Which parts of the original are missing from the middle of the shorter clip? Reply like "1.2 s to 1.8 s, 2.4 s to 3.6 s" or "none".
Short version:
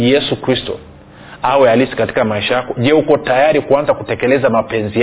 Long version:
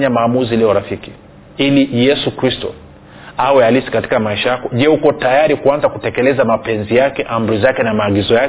none